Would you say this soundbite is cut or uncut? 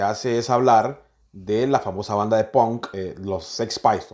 uncut